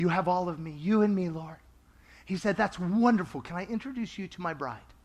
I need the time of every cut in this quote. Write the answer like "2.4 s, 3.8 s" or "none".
none